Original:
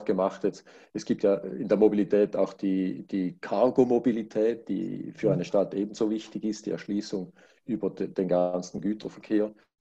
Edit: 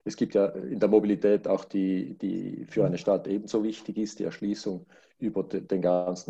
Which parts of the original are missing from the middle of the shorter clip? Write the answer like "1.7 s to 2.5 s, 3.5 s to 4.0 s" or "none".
3.1 s to 4.7 s